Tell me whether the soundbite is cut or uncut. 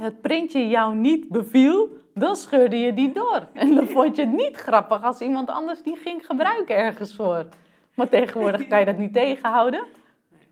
uncut